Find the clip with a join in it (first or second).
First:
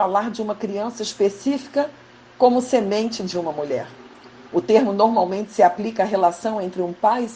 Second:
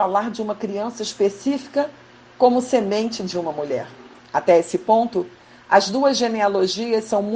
second